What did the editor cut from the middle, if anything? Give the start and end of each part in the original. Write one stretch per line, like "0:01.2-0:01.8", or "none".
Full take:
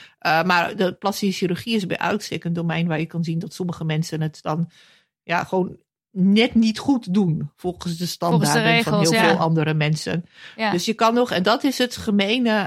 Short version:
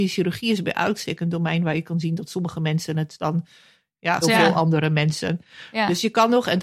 0:05.5-0:09.1

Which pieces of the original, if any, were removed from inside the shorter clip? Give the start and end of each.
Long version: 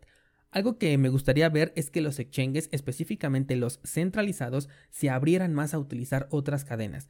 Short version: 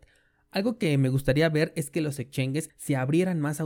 0:02.7-0:04.8

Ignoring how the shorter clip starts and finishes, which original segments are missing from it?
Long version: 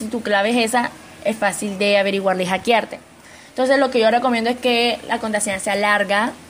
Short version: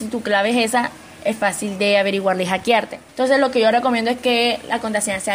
0:03.1-0:03.5

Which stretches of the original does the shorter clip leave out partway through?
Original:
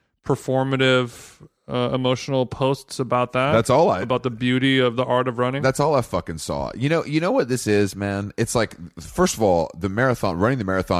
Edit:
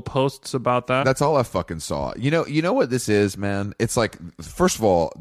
0:03.5-0:05.6

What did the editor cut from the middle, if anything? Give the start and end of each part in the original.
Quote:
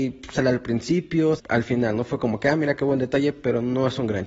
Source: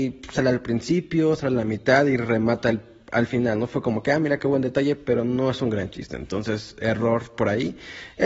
0:01.4-0:03.0

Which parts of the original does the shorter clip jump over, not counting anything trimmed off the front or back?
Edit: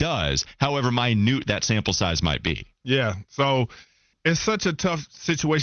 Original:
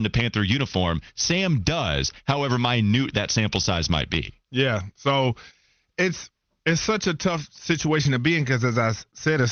0:05.8-0:06.5

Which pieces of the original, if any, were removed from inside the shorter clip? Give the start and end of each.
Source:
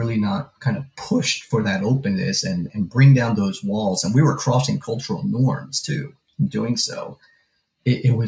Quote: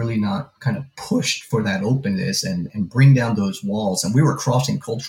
none

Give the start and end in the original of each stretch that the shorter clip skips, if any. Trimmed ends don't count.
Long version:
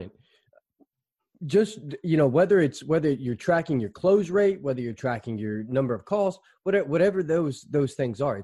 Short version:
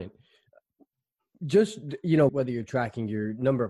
0:02.3-0:04.6

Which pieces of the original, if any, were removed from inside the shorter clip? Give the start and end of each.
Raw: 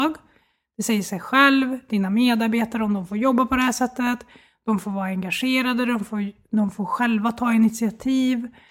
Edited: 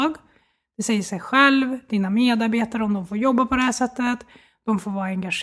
none

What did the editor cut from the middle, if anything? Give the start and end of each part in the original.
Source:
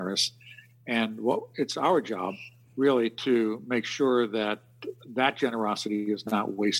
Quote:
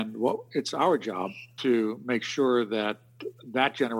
0:02.6-0:03.2

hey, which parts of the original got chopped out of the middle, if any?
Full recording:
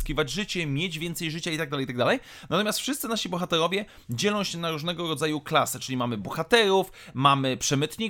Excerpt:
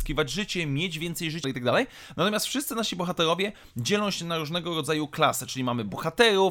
0:01.4-0:01.8

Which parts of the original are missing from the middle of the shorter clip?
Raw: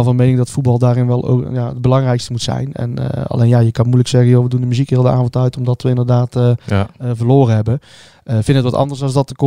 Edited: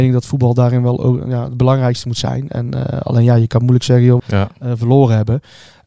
0:04.4-0:06.6

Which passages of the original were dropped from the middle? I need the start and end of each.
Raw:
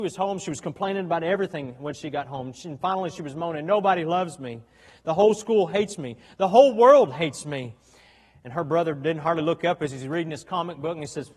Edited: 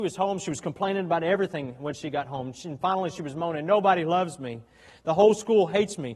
none

